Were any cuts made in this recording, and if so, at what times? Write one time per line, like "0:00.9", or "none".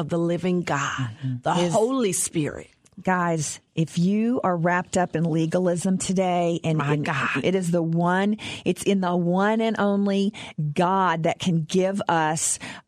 0:03.7
0:07.4